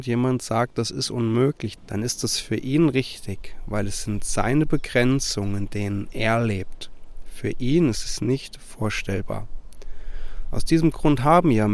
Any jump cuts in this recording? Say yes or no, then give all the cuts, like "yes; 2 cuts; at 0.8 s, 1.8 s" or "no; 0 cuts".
yes; 1 cut; at 1.8 s